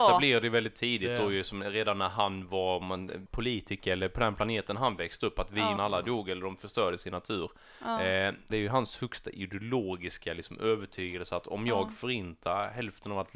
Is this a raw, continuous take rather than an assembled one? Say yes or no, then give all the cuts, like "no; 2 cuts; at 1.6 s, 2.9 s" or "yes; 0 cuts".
no; 3 cuts; at 3.3 s, 5.8 s, 8.5 s